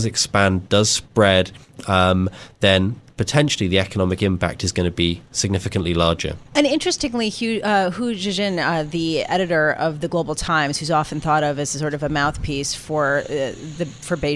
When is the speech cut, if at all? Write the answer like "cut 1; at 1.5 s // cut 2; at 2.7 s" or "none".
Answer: none